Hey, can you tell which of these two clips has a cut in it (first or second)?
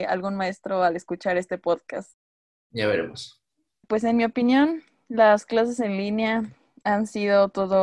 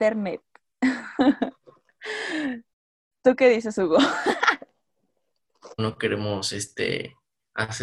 second